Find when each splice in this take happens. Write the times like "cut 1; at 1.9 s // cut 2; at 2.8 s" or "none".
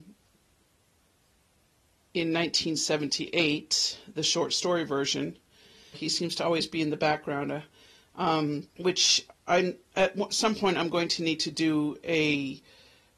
cut 1; at 5.9 s // cut 2; at 8.7 s